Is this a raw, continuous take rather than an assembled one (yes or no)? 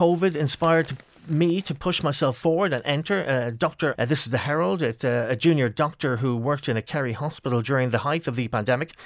no